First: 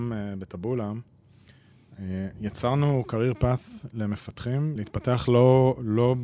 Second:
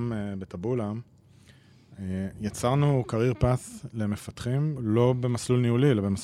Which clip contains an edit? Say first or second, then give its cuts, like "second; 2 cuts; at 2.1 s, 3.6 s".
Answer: second; 1 cut; at 4.8 s